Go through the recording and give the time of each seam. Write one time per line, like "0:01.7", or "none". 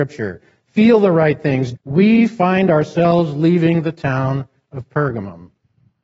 0:01.7